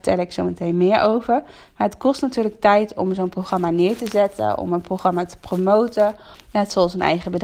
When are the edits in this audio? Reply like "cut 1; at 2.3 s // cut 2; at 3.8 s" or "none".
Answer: cut 1; at 6.3 s